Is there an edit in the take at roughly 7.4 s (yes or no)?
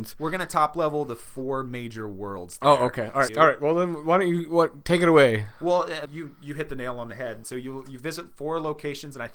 yes